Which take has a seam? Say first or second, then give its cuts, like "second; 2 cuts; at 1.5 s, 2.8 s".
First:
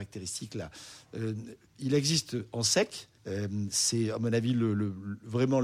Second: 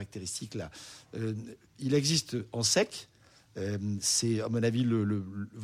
first; 1 cut; at 3.2 s